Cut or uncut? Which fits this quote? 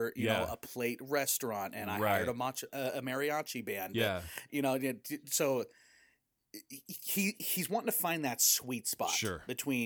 uncut